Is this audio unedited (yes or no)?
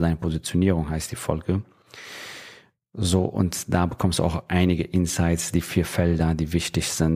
yes